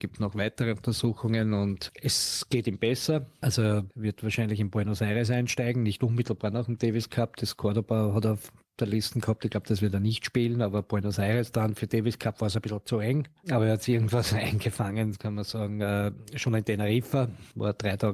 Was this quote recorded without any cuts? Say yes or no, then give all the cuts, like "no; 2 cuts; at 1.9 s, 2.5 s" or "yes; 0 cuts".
yes; 0 cuts